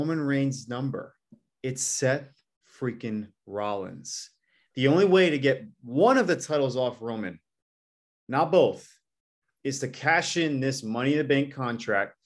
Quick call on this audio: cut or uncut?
uncut